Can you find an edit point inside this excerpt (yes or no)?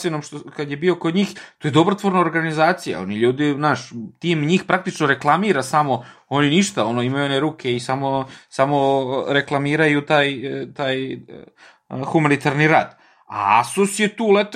no